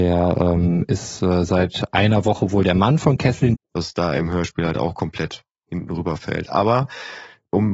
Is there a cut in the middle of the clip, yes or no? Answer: yes